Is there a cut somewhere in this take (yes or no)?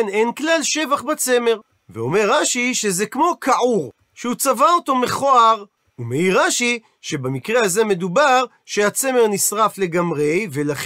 yes